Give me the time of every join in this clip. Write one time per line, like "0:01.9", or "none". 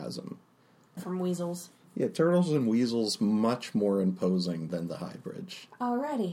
0:01.0